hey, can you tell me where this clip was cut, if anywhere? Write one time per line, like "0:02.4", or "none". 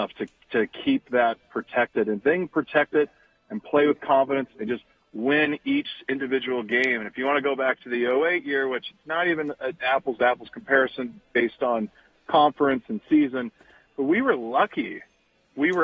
none